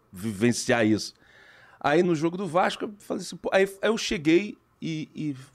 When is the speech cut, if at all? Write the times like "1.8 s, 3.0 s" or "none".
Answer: 2.0 s